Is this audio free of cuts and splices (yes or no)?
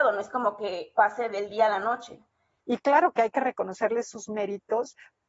no